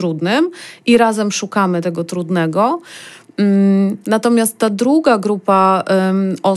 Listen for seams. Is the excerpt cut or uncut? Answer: cut